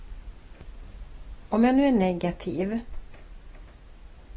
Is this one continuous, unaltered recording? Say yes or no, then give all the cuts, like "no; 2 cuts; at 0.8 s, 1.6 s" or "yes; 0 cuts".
no; 1 cut; at 1.5 s